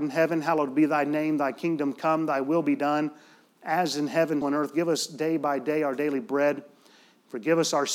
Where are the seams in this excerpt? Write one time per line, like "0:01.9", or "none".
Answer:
0:04.4